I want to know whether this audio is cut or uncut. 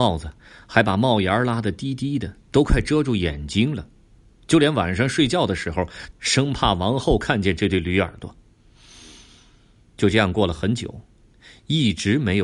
cut